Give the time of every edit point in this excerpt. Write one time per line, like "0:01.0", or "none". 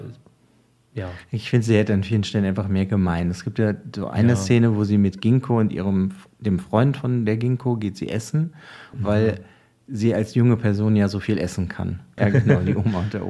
0:08.9
0:12.2